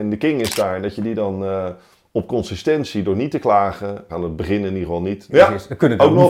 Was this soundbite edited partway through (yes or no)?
yes